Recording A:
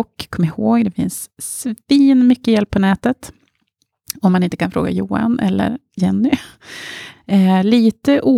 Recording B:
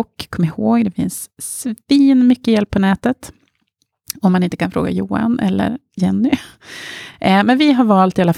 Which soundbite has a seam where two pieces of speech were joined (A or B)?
A